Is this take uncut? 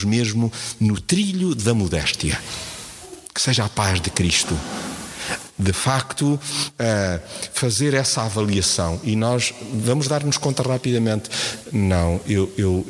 yes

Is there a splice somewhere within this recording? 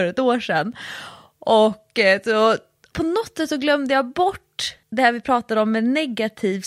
yes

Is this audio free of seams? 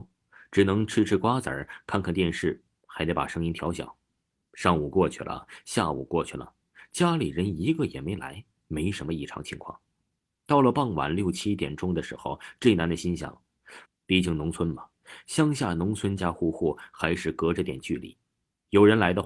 no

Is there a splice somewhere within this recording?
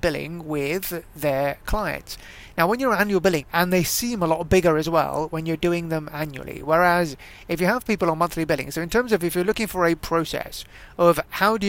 yes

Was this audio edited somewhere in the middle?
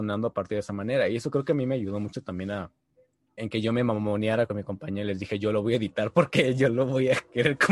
yes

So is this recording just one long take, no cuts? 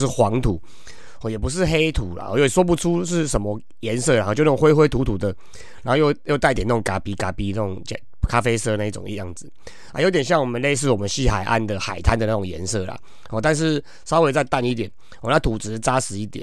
yes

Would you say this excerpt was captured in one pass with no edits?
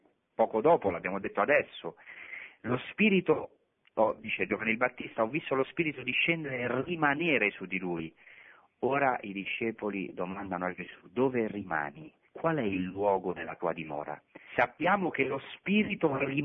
no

